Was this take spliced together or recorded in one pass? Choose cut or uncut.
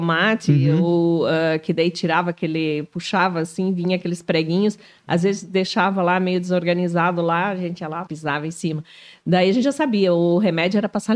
cut